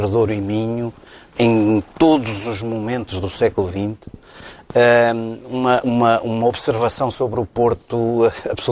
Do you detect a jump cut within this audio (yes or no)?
no